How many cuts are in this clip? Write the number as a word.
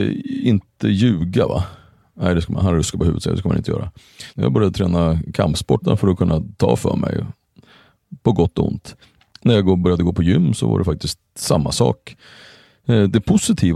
two